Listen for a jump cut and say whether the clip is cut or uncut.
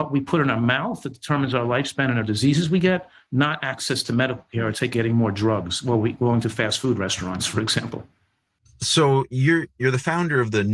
uncut